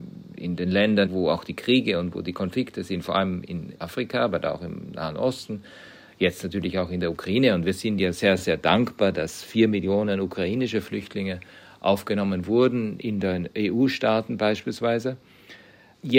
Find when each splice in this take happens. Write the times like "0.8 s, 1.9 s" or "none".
none